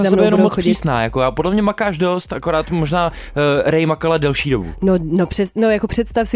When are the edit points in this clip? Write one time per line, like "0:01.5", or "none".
none